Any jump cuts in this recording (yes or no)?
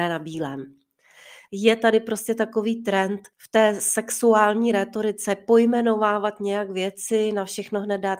yes